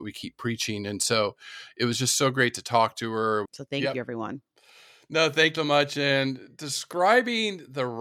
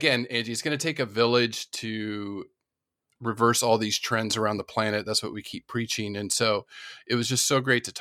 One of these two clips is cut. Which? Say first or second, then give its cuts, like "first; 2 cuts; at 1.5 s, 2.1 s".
first; 2 cuts; at 3.4 s, 5.6 s